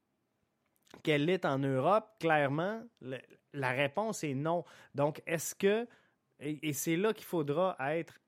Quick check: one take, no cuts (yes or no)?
no